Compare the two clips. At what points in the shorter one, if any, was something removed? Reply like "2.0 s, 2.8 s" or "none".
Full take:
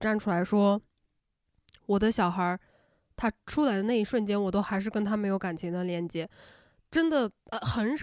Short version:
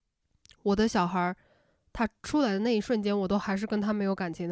none

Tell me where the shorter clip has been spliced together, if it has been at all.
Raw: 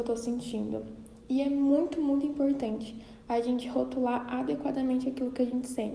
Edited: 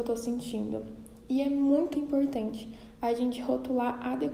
1.9 s

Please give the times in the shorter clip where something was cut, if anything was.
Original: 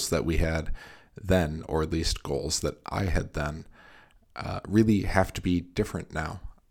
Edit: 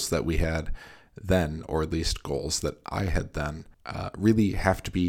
3.7 s

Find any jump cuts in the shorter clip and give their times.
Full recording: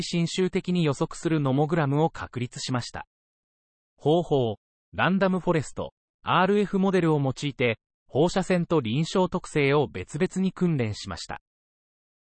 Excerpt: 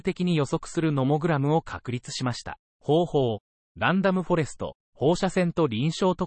2.7 s, 4.8 s

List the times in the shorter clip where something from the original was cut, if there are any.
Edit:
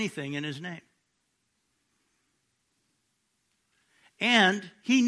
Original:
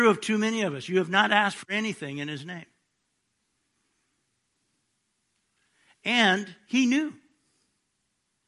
none

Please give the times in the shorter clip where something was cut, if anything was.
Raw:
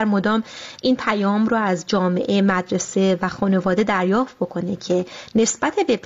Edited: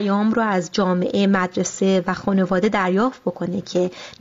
none

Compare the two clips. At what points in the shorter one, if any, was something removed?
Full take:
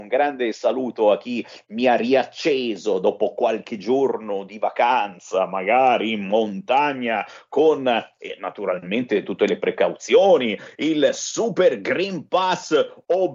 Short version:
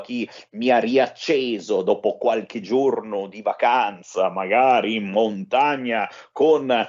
none

